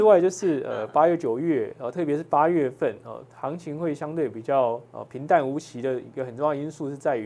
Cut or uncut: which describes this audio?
uncut